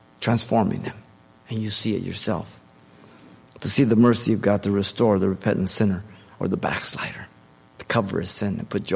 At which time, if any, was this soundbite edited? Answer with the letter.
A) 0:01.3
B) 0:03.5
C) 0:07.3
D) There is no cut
A